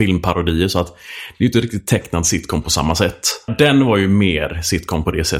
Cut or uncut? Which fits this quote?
cut